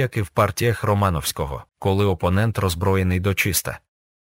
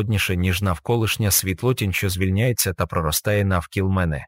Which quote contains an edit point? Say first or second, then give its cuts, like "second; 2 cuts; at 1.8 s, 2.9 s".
first; 1 cut; at 1.7 s